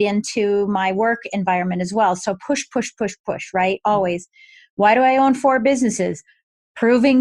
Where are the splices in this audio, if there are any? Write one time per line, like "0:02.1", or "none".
none